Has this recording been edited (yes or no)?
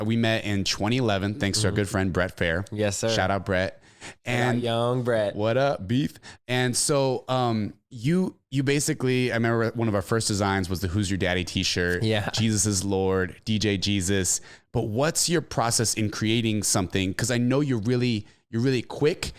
no